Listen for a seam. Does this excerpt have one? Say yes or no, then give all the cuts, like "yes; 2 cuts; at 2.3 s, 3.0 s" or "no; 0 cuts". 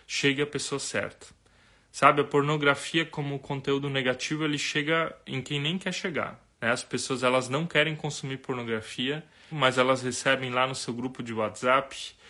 yes; 2 cuts; at 6.5 s, 9.5 s